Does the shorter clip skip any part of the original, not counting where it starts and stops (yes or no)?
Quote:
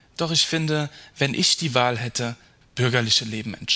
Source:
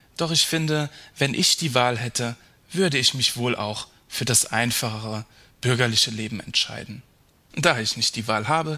yes